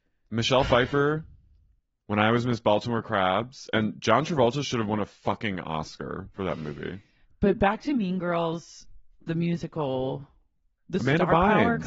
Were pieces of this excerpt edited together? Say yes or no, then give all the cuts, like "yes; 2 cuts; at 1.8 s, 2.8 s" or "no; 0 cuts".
yes; 1 cut; at 10.8 s